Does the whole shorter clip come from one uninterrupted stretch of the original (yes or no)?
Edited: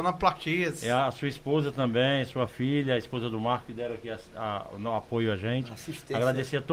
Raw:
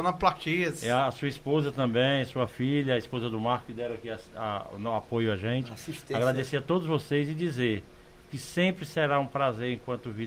yes